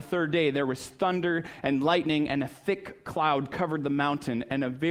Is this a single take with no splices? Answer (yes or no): yes